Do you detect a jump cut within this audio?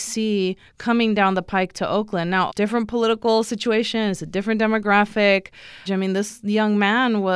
yes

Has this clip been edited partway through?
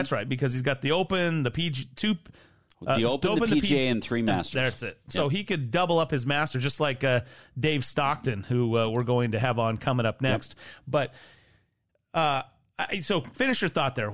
no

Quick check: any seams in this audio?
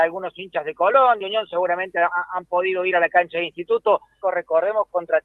yes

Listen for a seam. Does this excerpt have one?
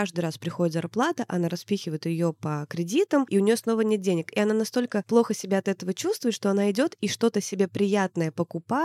no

